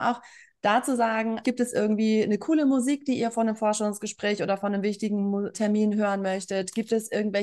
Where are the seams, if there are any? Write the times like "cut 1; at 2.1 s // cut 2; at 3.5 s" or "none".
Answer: cut 1; at 1.4 s // cut 2; at 5.5 s